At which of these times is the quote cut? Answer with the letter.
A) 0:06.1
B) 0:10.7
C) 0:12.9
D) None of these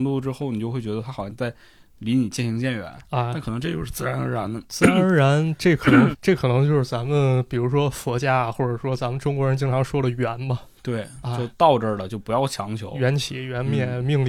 A